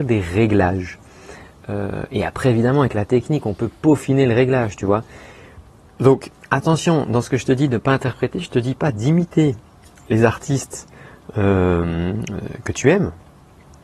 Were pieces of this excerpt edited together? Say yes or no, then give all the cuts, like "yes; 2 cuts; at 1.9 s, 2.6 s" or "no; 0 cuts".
no; 0 cuts